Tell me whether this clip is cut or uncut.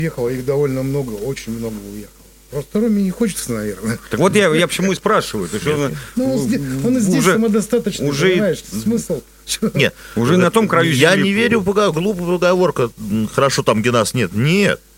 uncut